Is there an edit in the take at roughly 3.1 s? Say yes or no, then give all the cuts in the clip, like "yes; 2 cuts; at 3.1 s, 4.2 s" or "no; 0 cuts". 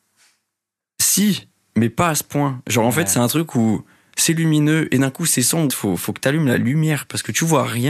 no; 1 cut; at 5.7 s